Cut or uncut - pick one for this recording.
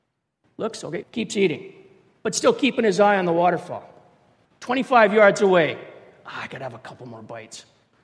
cut